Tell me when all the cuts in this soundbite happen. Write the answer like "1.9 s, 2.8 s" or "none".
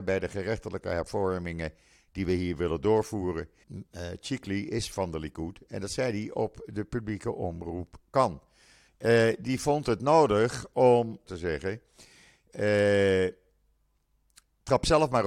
3.6 s, 8.9 s, 11.3 s